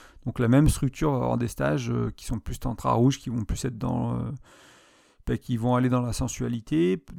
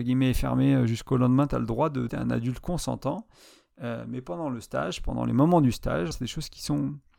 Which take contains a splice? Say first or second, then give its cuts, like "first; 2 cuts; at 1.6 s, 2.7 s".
second; 2 cuts; at 2.1 s, 6.1 s